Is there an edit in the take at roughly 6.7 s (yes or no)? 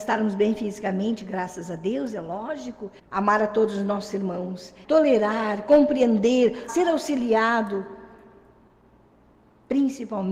yes